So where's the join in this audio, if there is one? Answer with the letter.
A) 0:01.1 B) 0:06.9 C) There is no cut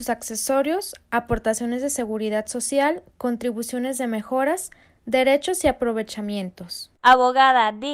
B